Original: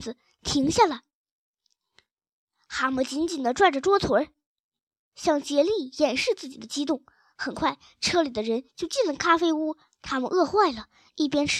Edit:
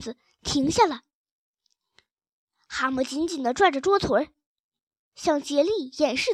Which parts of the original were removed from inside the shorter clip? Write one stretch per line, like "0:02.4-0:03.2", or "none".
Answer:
none